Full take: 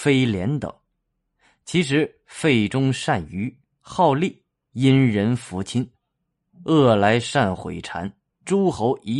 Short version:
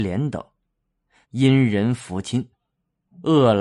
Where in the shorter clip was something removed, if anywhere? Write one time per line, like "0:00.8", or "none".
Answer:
0:01.2